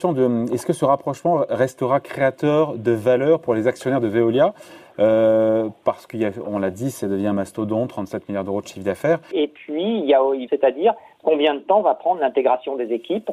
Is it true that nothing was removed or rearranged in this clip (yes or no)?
no